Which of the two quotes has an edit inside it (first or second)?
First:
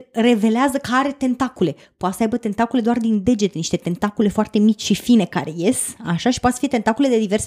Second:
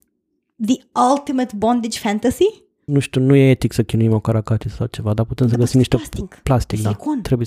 second